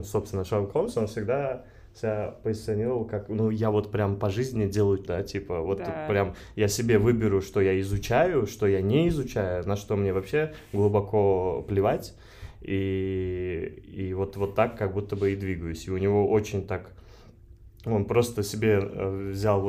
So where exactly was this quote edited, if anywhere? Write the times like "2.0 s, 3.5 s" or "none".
5.0 s